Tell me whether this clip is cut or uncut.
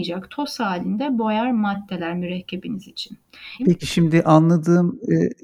cut